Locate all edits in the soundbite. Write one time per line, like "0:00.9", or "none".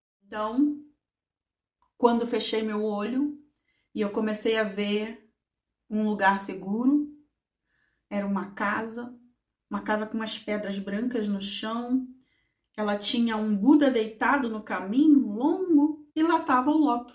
0:16.1